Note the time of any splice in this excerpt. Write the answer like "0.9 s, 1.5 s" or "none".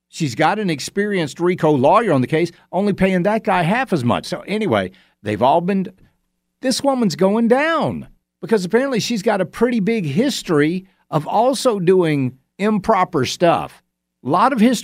4.2 s, 12.5 s